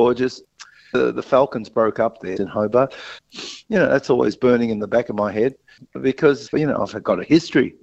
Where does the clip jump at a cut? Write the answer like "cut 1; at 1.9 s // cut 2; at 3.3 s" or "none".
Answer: cut 1; at 2.4 s // cut 2; at 6.5 s